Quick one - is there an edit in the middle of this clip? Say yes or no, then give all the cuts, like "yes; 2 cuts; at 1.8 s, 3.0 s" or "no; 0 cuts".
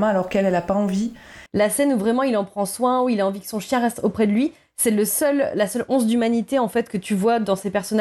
yes; 1 cut; at 1.5 s